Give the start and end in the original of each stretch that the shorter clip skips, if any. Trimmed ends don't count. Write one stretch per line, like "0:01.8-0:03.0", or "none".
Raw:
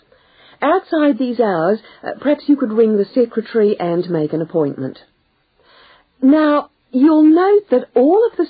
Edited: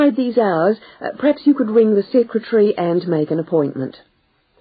none